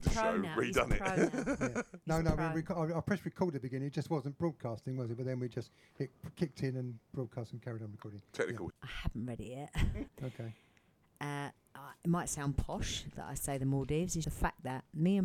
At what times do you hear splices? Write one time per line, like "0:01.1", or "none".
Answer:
0:08.7
0:10.1
0:14.2